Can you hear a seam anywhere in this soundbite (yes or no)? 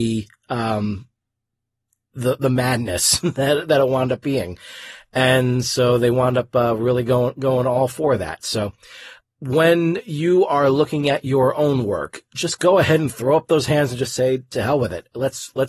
yes